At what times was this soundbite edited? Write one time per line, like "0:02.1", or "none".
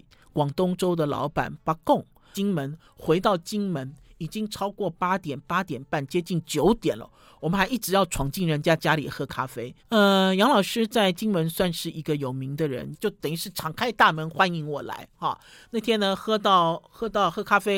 0:02.3
0:09.8
0:12.9